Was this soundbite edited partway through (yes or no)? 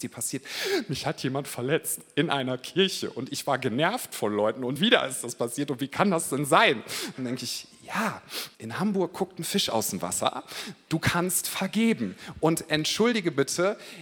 yes